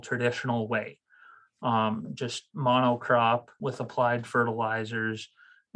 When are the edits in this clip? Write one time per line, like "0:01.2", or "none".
0:03.6